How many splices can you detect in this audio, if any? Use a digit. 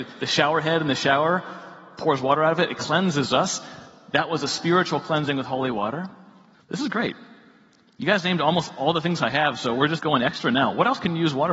2